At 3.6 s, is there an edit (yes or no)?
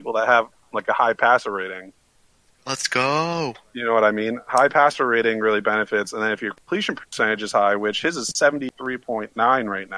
no